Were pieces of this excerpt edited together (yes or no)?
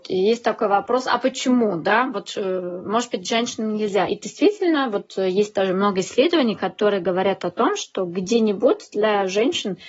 no